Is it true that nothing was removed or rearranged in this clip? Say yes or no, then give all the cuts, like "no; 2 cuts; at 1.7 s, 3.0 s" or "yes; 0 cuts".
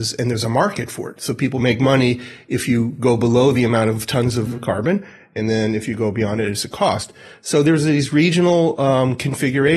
yes; 0 cuts